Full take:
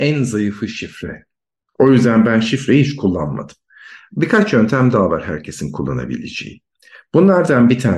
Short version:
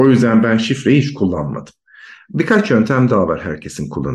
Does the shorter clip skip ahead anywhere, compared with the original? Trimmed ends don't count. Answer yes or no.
no